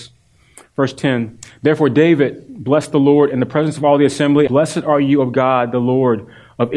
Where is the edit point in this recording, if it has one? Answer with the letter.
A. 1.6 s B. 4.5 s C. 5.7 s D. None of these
B